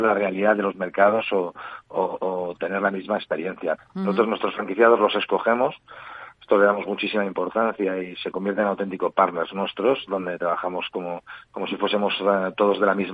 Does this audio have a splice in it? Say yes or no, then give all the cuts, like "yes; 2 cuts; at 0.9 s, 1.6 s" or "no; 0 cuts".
yes; 1 cut; at 3.8 s